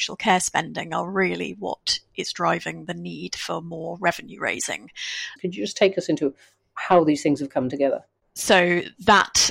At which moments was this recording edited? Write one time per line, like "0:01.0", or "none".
0:05.4
0:08.2

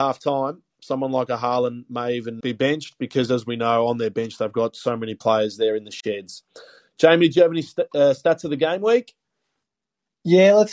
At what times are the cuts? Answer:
0:02.4

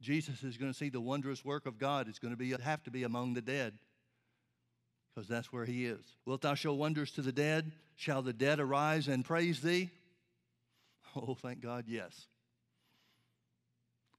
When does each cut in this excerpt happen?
0:02.6
0:06.2

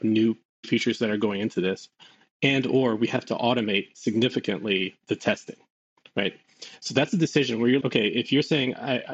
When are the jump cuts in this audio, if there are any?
0:05.0
0:07.8

